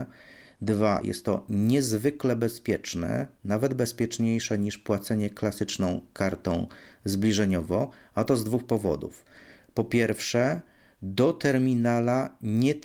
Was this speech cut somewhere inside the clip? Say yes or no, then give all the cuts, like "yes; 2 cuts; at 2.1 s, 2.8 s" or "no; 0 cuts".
no; 0 cuts